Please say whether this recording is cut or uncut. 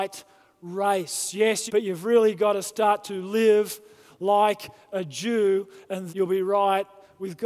cut